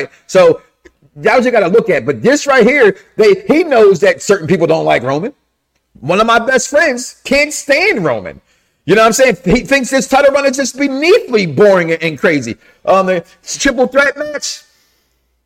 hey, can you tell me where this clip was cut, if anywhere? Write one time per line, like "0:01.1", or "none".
none